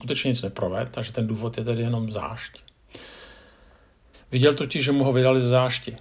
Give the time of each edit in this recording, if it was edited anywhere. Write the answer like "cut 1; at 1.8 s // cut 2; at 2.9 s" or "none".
cut 1; at 4.1 s